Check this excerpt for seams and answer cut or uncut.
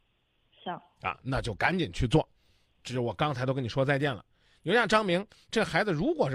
uncut